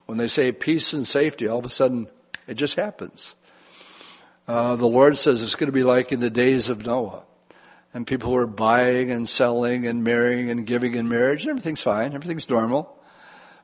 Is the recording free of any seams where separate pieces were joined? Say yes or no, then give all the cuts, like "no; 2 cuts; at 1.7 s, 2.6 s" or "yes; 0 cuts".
yes; 0 cuts